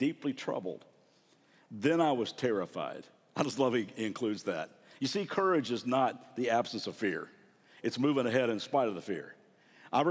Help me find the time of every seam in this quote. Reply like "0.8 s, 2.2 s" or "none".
none